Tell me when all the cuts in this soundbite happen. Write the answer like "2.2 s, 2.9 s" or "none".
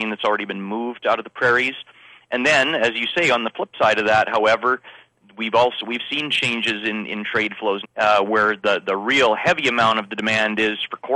7.8 s